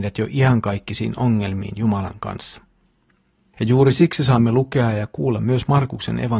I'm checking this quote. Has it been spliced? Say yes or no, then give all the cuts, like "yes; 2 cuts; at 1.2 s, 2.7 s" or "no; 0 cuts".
yes; 1 cut; at 3.5 s